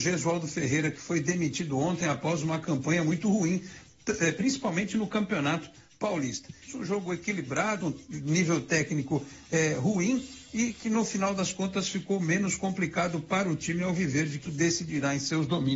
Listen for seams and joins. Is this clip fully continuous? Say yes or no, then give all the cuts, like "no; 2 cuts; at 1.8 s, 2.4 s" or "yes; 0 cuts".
no; 3 cuts; at 6.7 s, 7.8 s, 14.5 s